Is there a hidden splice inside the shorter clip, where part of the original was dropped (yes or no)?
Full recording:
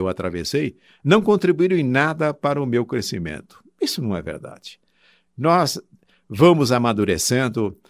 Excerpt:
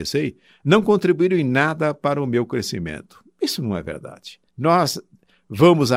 yes